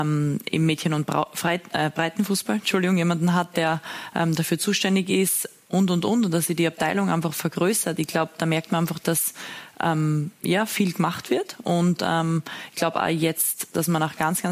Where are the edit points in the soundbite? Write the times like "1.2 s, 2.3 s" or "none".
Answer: none